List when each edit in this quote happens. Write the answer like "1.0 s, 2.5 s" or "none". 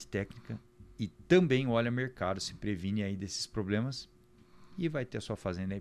none